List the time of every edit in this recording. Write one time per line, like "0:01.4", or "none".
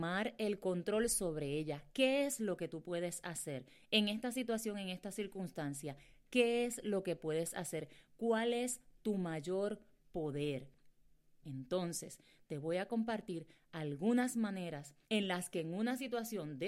0:11.4
0:15.0